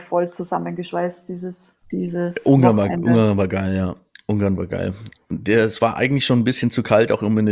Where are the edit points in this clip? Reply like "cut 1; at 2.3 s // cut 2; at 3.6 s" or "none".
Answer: cut 1; at 1.8 s